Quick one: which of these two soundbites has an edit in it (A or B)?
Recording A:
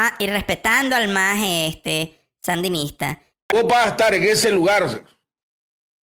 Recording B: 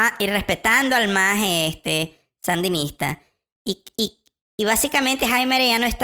A